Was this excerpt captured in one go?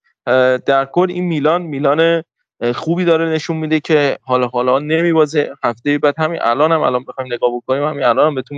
yes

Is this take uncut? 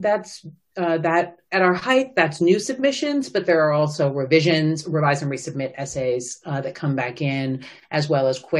yes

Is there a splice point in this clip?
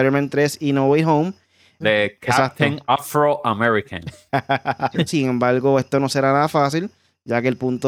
yes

